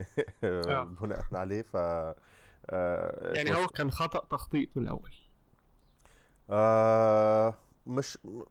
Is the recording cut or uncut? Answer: cut